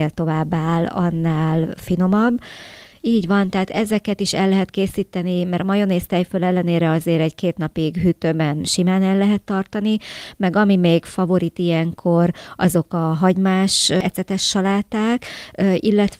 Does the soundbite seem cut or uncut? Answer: cut